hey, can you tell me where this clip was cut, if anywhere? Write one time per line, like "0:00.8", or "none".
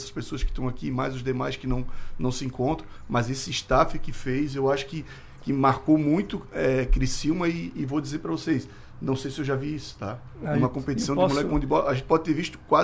none

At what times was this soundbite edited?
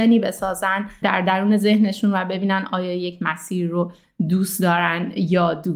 0:01.0

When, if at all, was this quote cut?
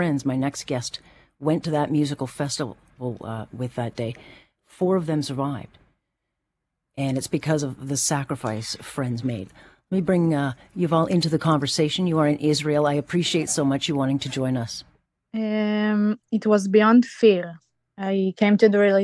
0:15.3

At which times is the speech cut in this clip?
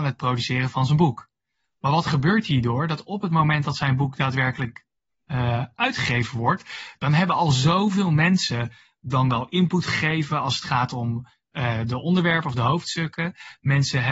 none

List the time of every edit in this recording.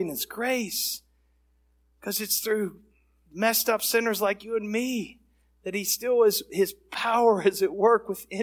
none

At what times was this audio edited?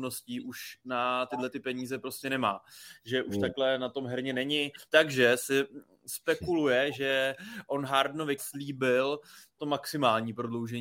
0:04.9
0:08.4
0:09.6

